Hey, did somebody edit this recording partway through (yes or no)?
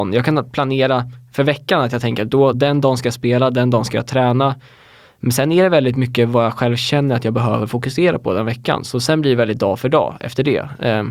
no